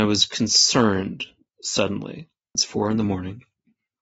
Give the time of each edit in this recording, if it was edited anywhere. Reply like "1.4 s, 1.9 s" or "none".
2.6 s